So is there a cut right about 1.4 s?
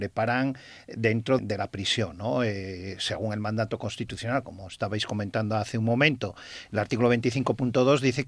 yes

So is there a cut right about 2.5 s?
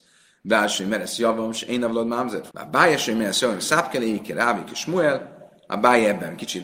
yes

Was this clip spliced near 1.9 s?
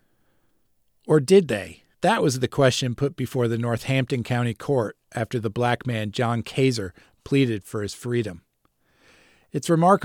yes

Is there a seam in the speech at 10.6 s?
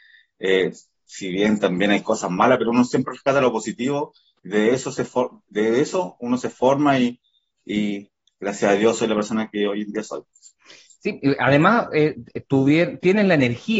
no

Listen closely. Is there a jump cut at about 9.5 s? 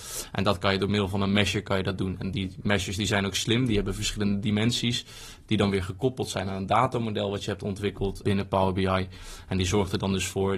no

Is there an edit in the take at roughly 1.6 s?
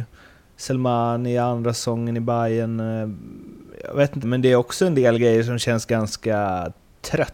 no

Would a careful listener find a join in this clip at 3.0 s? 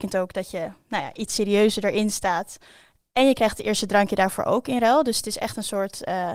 no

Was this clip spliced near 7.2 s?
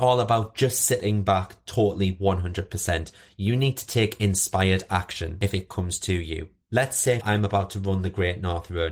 yes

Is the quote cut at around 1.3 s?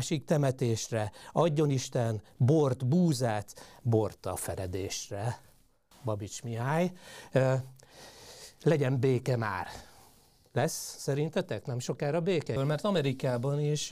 no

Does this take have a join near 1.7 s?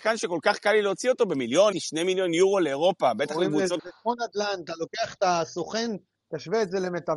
yes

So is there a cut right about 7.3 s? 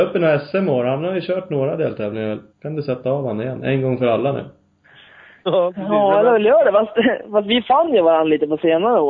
no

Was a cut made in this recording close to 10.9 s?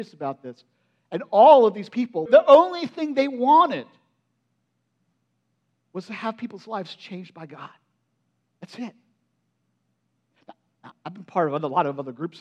yes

